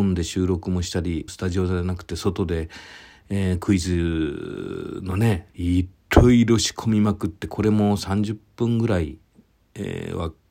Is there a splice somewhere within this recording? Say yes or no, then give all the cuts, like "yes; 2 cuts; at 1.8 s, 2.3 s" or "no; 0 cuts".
yes; 2 cuts; at 1.3 s, 5.5 s